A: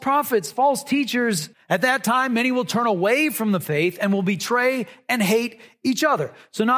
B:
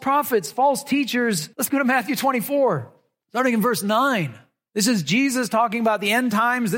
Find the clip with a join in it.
A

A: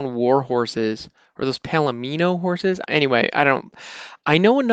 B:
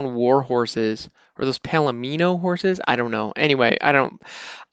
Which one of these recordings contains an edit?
A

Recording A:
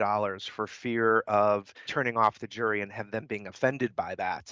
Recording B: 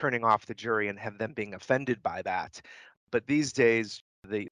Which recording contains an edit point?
A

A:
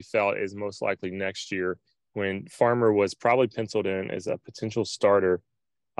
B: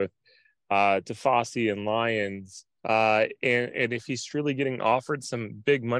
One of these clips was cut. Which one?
B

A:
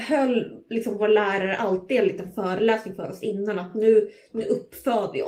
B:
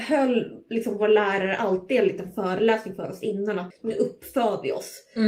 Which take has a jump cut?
B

